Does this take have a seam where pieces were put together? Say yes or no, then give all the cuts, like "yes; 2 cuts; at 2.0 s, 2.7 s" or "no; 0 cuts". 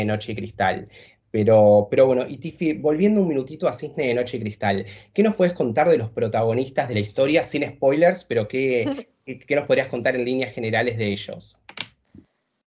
no; 0 cuts